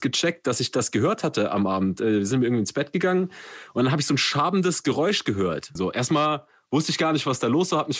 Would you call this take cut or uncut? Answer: cut